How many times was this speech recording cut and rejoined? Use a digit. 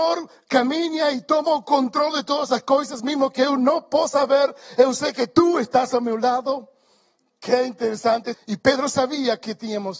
1